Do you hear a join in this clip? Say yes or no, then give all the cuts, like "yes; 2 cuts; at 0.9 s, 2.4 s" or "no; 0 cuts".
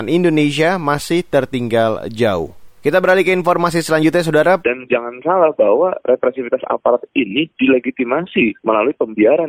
yes; 2 cuts; at 2.8 s, 4.6 s